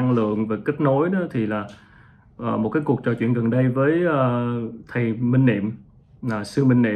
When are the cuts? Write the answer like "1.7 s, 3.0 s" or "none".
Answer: none